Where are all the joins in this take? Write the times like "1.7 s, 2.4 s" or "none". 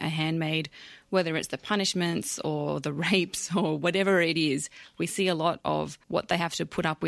6.0 s